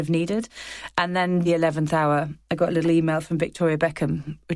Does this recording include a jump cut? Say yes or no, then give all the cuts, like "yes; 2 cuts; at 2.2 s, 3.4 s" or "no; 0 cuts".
yes; 1 cut; at 1.4 s